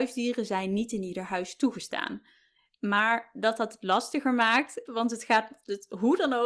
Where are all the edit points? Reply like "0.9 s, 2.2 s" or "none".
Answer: 4.9 s